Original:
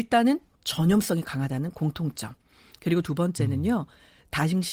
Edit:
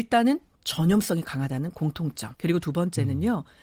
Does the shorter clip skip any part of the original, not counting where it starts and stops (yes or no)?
yes